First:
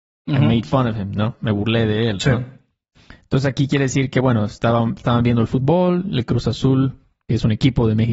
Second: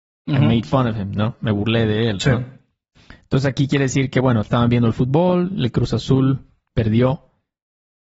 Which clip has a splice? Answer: second; 2 cuts; at 4.4 s, 6.7 s

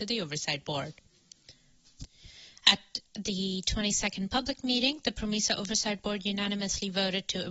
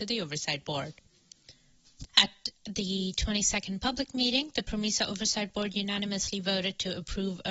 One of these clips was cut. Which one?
second; 1 cut; at 2.1 s

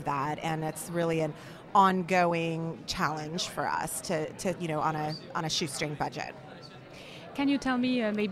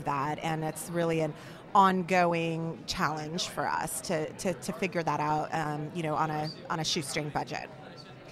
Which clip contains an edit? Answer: first; 1 cut; at 4.6 s

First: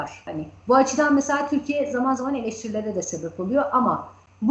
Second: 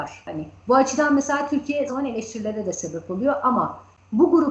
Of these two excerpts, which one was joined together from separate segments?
second; 1 cut; at 1.9 s

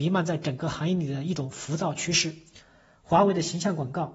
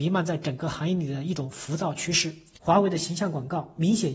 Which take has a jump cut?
second; 1 cut; at 2.6 s

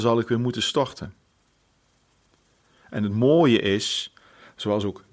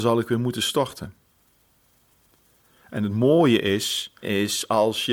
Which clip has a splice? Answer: second; 1 cut; at 4.2 s

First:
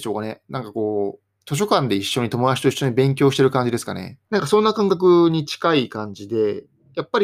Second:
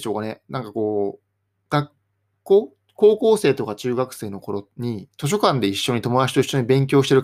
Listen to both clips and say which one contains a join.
first; 2 cuts; at 1.4 s, 4.3 s

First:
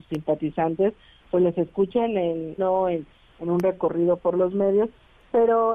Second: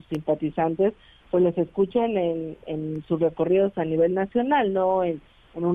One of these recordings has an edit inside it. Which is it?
first; 1 cut; at 2.6 s

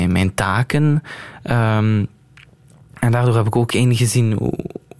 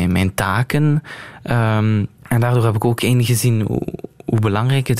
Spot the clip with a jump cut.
second; 1 cut; at 2.2 s

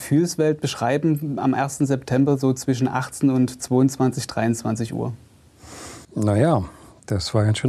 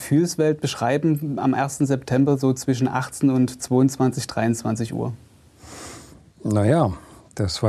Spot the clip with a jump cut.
first; 1 cut; at 6.0 s

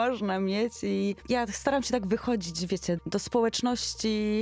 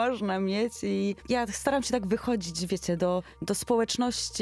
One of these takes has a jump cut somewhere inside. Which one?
first; 1 cut; at 3.0 s

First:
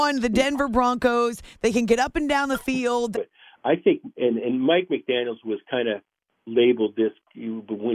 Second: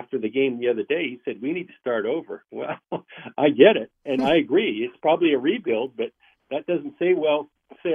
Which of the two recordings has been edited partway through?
first; 1 cut; at 3.1 s

